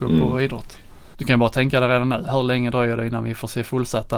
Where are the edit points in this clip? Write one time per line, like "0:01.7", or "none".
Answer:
0:01.1
0:02.2